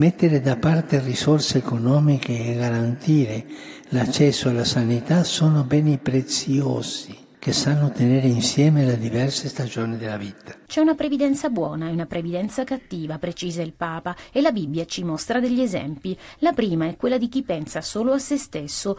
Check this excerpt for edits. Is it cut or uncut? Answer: uncut